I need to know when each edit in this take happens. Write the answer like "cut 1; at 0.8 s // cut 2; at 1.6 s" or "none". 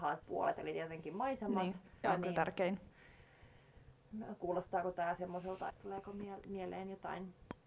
cut 1; at 2.0 s // cut 2; at 5.7 s